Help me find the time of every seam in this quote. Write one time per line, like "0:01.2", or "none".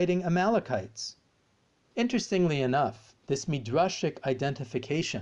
0:01.8
0:03.2